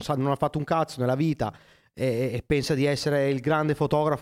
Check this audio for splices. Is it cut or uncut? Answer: uncut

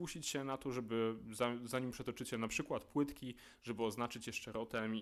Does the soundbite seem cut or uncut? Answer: uncut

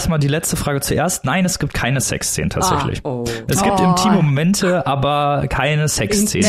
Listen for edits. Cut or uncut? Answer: uncut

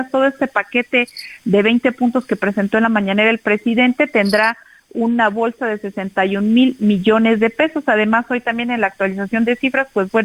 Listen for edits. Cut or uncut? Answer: uncut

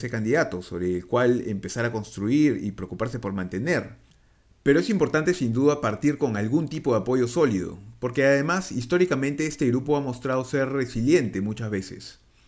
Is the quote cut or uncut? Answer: uncut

